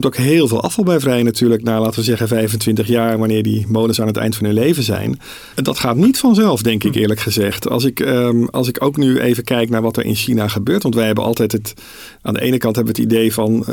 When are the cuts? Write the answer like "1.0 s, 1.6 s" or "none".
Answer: 5.5 s